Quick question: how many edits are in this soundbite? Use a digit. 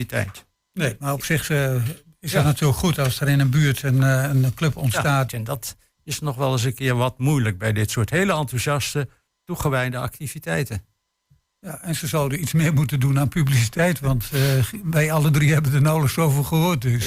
1